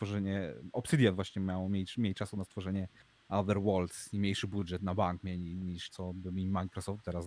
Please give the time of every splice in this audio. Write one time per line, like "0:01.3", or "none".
0:05.9